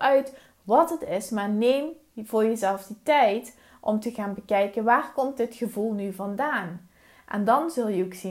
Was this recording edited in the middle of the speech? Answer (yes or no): no